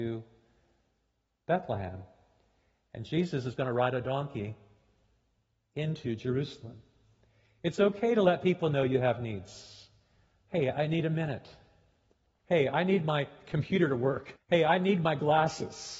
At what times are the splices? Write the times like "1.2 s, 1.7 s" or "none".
12.4 s, 14.4 s